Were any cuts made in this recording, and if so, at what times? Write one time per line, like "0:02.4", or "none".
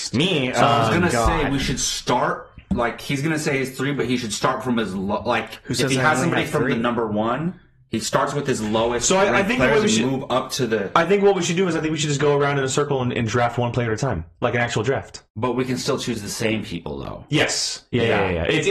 0:15.3